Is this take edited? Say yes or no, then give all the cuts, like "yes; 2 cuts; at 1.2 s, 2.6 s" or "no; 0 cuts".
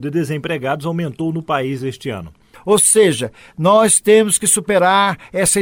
yes; 1 cut; at 2.5 s